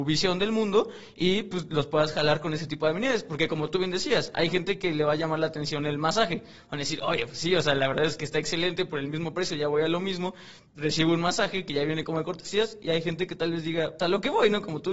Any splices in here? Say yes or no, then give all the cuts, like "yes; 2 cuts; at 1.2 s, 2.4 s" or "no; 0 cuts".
yes; 1 cut; at 14.0 s